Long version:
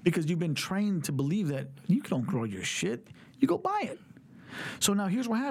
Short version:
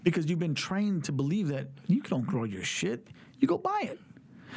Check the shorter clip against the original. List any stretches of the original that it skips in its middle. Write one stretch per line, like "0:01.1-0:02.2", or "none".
none